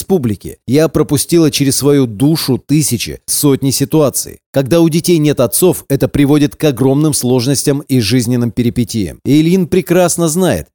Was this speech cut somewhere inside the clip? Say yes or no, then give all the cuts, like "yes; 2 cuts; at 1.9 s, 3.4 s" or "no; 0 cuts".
no; 0 cuts